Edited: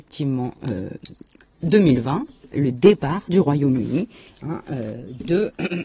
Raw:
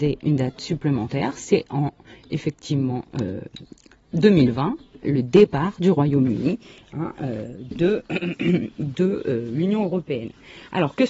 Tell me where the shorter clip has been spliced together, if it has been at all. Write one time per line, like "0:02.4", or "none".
none